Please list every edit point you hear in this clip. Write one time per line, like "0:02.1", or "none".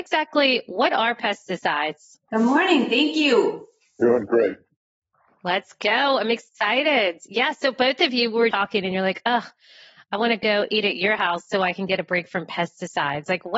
0:02.3
0:08.5